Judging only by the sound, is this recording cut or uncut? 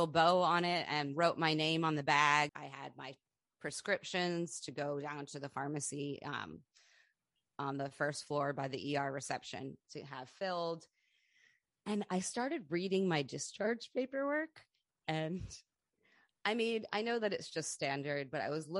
cut